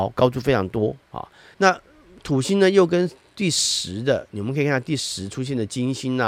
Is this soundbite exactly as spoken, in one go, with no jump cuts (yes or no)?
no